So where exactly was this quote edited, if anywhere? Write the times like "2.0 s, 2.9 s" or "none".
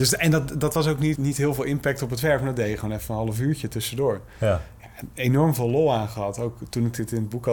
1.2 s